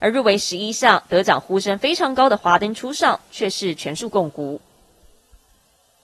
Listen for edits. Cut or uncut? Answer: uncut